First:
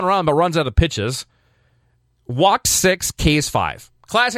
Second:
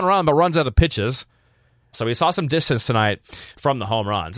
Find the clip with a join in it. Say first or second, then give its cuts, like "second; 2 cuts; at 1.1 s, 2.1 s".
second; 1 cut; at 1.9 s